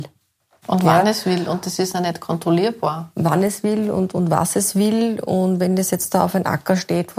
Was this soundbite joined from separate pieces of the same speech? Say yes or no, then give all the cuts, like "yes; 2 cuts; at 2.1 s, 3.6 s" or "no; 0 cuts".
no; 0 cuts